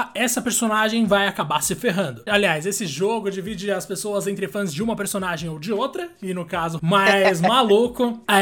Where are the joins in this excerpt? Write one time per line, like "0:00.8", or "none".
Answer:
0:02.3
0:06.8